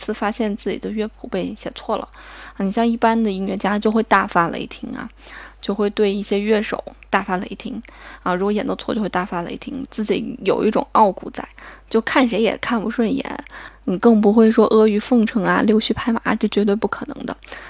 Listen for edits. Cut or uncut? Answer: cut